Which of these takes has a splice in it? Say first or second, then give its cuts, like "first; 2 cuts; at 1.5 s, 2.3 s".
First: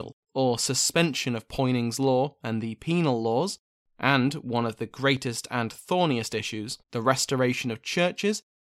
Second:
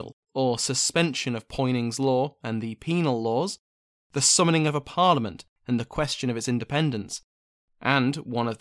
first; 2 cuts; at 3.8 s, 6.8 s